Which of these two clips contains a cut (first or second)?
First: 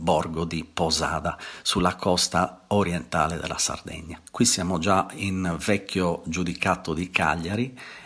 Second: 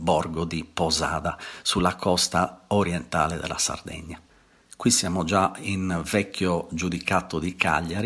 first